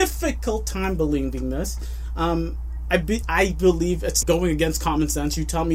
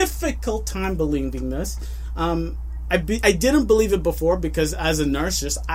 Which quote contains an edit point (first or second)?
first